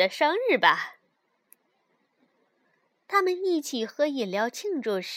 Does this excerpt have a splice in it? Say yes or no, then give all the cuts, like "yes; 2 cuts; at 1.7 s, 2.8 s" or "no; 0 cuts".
no; 0 cuts